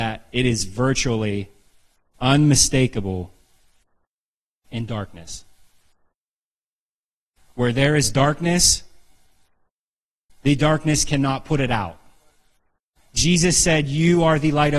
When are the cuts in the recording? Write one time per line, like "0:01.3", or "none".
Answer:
0:10.3